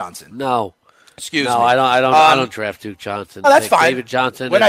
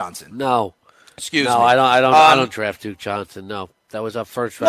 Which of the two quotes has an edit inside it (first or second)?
first